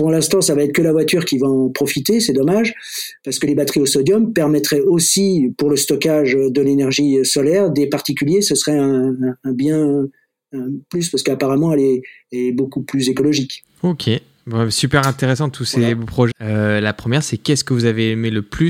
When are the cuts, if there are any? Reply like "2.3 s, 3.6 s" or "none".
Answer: 16.3 s